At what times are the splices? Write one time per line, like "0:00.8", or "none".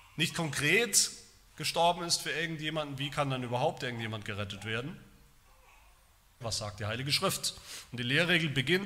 0:06.4